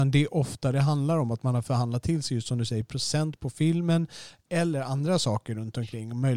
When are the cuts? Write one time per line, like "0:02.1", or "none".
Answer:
none